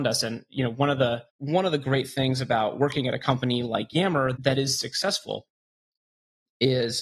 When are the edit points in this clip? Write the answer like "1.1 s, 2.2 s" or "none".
1.3 s, 4.3 s